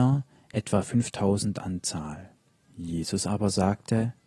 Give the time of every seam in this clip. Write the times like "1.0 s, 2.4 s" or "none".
2.6 s